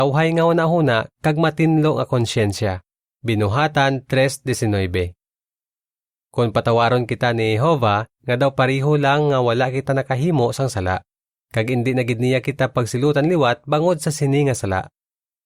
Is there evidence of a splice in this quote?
yes; 3 cuts; at 3.1 s, 8.1 s, 11.4 s

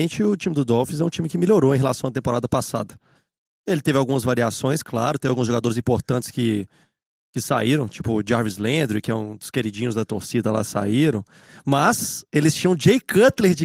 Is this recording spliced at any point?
no; 0 cuts

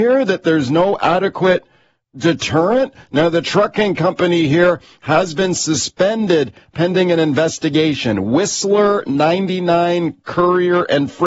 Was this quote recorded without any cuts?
yes; 0 cuts

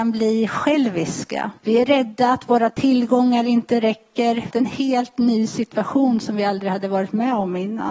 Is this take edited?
yes; 2 cuts; at 1.6 s, 4.5 s

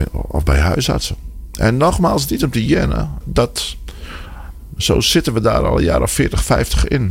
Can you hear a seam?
yes; 1 cut; at 3.2 s

